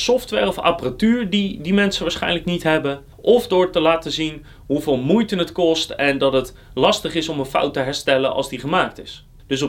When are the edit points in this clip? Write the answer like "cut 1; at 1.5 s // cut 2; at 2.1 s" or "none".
cut 1; at 3.1 s